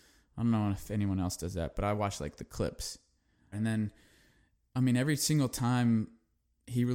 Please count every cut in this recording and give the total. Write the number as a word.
one